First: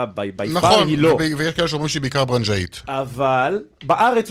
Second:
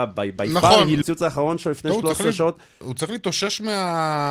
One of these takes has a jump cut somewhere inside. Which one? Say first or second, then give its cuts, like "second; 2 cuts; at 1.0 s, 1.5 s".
second; 1 cut; at 1.0 s